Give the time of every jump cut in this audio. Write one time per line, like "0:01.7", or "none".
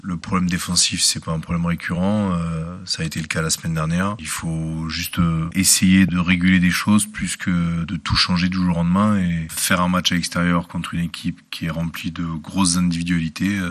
none